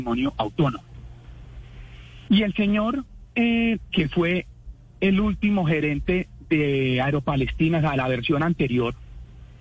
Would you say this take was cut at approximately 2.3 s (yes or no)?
yes